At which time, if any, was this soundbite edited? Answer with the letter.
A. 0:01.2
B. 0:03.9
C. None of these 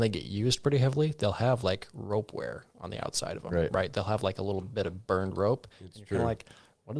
C